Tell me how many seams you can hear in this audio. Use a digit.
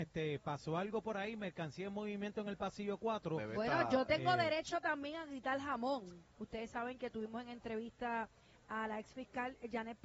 1